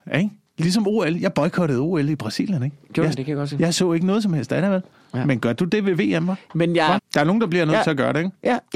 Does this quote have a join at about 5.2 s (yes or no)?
no